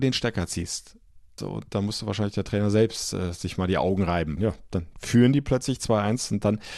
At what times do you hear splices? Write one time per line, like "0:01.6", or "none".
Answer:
0:01.4
0:04.4